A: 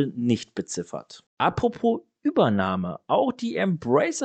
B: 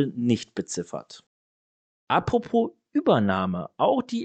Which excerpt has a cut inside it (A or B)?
A